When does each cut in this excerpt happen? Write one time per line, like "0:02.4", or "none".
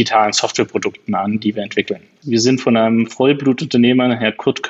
0:02.2